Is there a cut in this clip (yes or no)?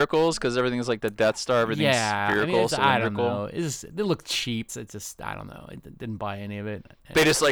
yes